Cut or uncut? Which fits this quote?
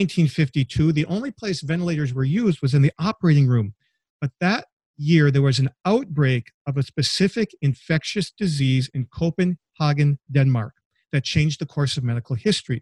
uncut